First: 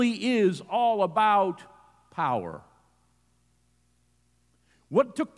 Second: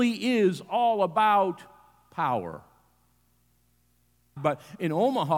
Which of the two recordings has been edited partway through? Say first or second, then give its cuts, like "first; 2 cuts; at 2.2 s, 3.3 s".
second; 1 cut; at 4.4 s